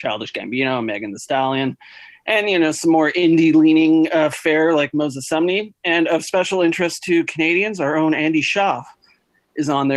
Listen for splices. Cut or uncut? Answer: uncut